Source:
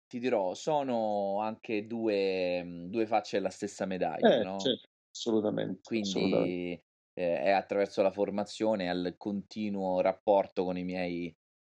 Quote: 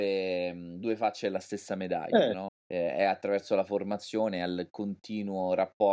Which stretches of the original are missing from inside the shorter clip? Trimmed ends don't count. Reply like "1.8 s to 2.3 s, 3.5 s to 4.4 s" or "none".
4.6 s to 6.9 s

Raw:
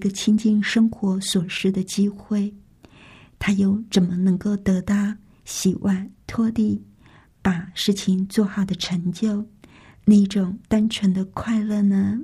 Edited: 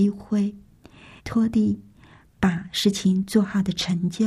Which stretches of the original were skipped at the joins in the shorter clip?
3.2 s to 6.2 s

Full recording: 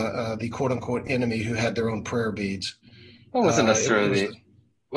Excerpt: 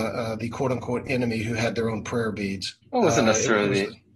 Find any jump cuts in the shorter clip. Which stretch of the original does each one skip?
2.8 s to 3.2 s

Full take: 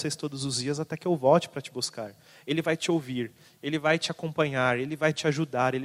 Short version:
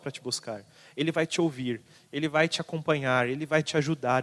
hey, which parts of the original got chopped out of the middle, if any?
none

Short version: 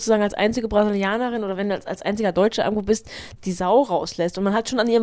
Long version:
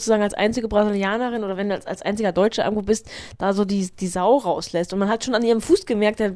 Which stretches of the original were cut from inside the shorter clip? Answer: 3.4 s to 3.9 s

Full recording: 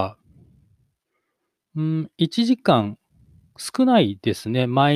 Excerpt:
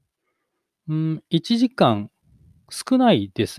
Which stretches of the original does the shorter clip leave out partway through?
none

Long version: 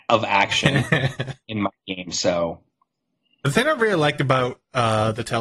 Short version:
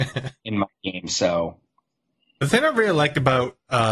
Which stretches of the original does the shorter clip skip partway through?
none

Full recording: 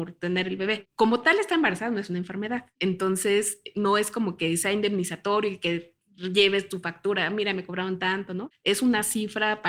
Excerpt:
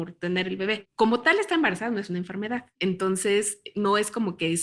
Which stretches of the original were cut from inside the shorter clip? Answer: none

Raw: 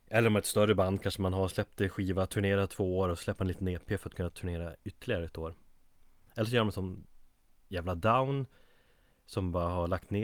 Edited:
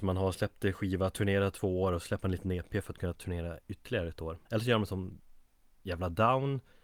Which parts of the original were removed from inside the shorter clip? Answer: 5.6 s to 6.3 s

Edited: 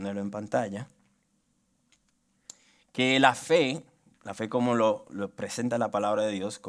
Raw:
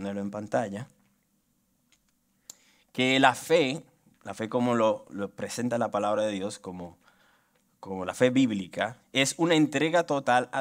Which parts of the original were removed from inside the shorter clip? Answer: none

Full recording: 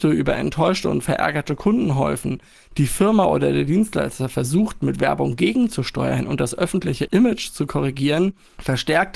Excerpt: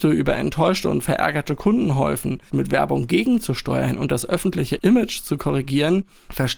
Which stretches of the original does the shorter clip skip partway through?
2.5 s to 4.8 s

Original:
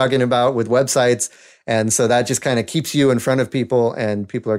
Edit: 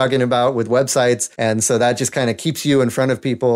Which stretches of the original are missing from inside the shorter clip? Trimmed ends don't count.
1.3 s to 1.6 s

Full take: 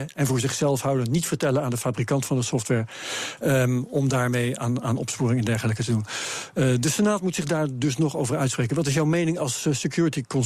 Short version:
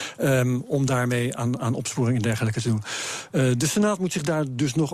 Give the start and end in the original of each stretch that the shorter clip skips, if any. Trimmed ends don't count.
none

